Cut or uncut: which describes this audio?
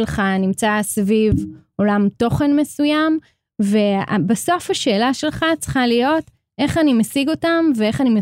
uncut